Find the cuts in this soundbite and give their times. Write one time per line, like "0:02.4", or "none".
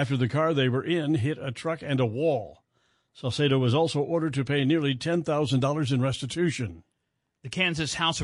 none

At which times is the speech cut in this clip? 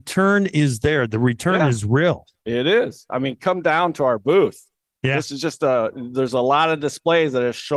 0:03.1

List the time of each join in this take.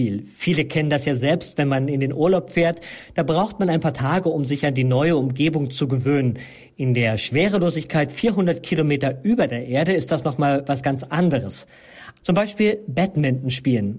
0:12.2

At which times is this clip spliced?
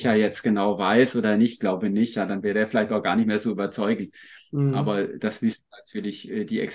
none

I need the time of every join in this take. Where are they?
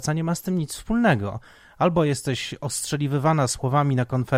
none

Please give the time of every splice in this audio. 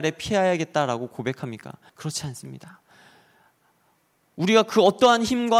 0:01.9

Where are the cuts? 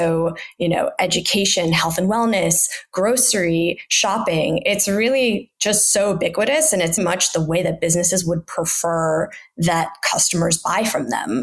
0:07.0

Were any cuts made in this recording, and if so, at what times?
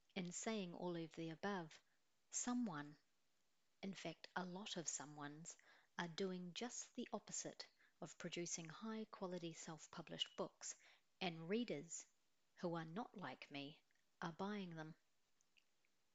none

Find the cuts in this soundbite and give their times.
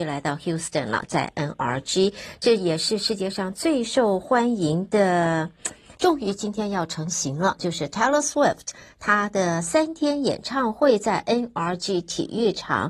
0:05.9
0:07.6

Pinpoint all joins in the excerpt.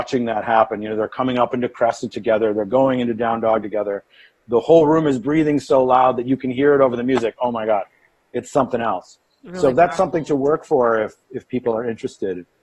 none

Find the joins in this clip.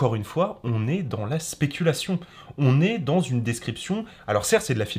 none

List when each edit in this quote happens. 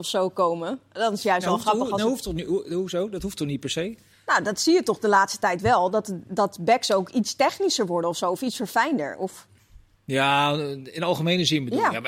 none

